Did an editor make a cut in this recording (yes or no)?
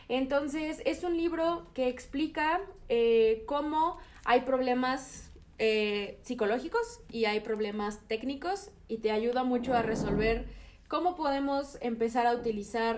no